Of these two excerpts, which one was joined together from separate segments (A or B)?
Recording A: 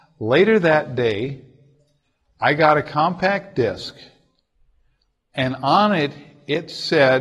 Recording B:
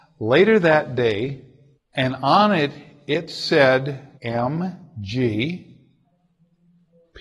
B